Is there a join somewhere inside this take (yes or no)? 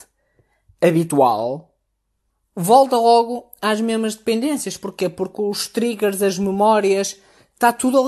no